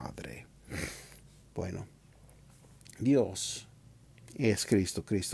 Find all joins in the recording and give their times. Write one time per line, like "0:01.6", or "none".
none